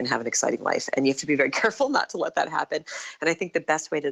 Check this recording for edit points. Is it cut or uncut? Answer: uncut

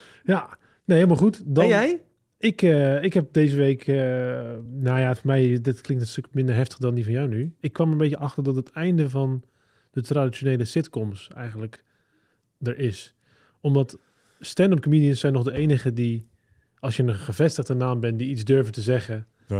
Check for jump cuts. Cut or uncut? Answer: uncut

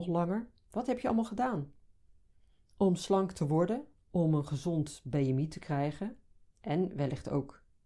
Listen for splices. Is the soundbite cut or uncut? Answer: cut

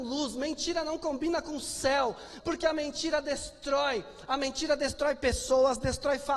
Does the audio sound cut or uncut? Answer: cut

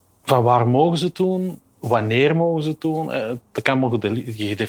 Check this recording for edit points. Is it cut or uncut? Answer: uncut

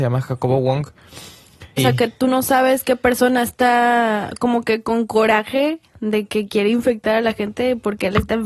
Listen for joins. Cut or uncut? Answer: cut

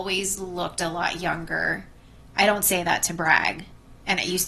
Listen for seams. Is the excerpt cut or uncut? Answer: uncut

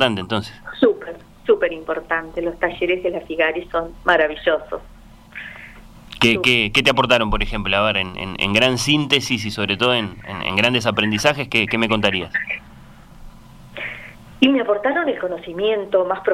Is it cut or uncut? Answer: uncut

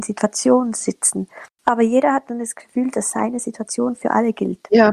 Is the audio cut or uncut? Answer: cut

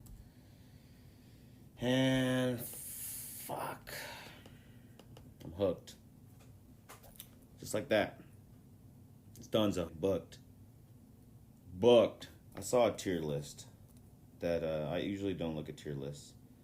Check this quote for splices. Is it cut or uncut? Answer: cut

